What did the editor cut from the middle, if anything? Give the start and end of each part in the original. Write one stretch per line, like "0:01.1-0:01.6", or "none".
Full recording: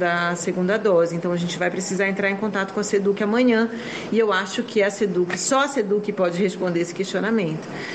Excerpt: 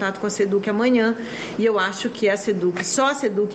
none